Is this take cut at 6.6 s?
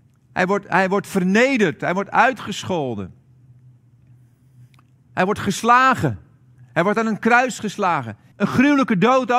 yes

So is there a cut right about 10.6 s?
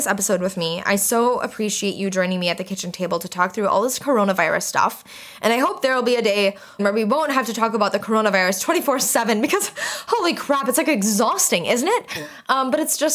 no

